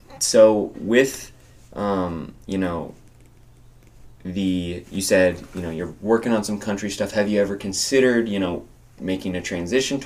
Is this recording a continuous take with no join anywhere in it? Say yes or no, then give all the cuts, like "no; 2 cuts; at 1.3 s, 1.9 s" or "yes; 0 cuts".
yes; 0 cuts